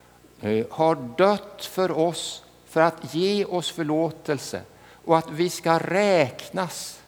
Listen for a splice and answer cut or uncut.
uncut